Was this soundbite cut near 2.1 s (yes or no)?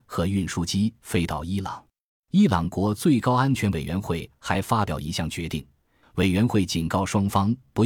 yes